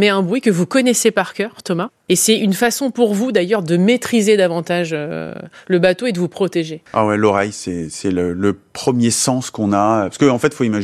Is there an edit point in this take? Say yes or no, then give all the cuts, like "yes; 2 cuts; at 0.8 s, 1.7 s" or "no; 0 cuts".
no; 0 cuts